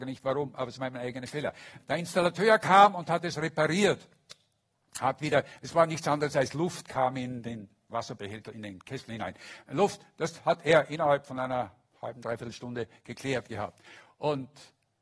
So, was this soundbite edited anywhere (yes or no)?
no